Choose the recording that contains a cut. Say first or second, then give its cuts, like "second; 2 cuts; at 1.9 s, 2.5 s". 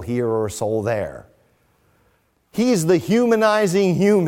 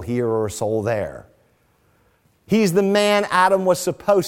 second; 1 cut; at 2.2 s